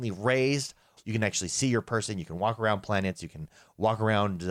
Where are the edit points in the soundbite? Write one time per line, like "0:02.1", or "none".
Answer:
0:01.0